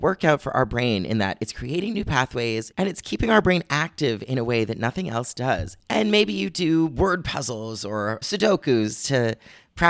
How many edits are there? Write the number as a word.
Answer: three